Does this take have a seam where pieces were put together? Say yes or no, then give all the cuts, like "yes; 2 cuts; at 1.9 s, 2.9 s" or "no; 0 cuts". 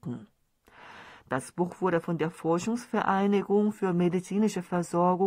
yes; 1 cut; at 1.2 s